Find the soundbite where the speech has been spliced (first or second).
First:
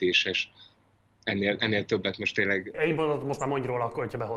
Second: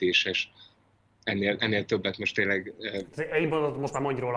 first